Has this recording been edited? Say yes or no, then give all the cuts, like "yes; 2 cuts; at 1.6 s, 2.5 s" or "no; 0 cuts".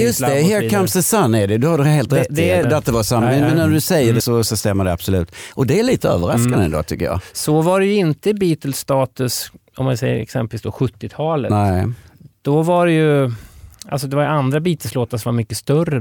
yes; 2 cuts; at 2.6 s, 4.2 s